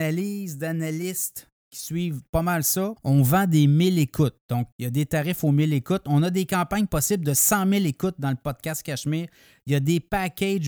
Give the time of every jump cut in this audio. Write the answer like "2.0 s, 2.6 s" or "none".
3.0 s, 4.7 s